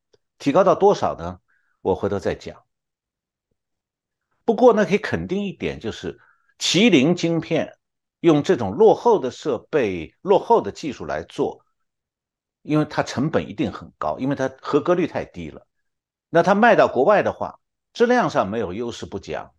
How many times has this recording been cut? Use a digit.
0